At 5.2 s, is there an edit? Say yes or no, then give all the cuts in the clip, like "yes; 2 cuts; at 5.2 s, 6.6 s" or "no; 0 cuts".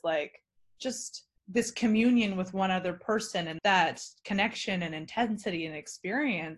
no; 2 cuts; at 1.4 s, 3.6 s